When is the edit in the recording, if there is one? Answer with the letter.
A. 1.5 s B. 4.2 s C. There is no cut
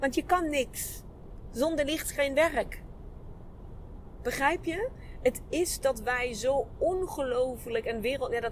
C